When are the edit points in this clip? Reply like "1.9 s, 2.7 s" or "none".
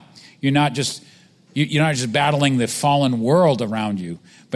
none